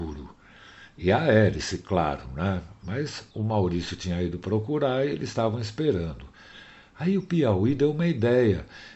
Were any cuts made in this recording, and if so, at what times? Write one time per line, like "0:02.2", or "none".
0:03.3

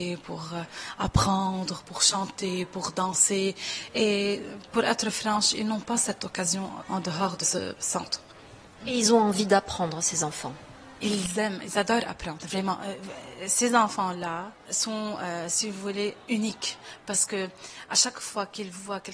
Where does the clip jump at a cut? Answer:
0:08.8

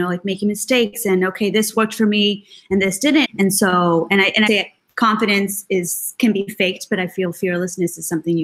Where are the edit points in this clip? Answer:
0:03.2
0:04.5

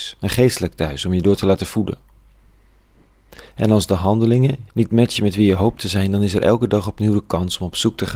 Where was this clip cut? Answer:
0:04.7

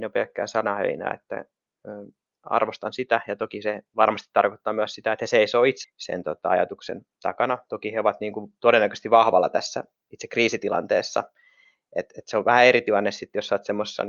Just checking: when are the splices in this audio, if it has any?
0:05.8

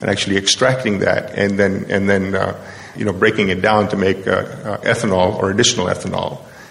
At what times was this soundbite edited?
0:02.9

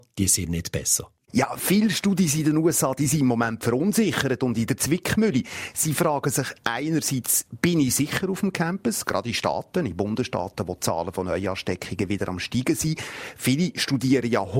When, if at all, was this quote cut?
none

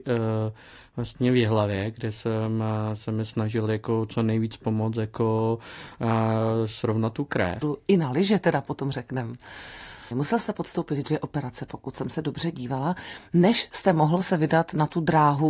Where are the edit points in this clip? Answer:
0:07.6
0:10.1

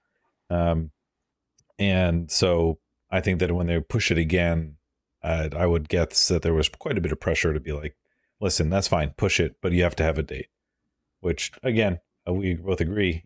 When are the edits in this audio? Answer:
none

